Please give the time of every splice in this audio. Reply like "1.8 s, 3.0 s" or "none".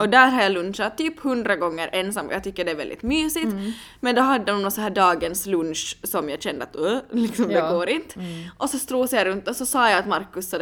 none